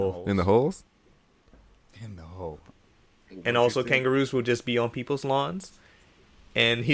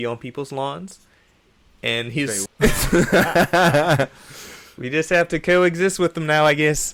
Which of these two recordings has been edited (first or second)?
second